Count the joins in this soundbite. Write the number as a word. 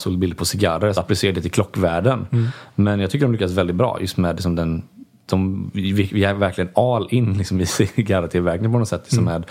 two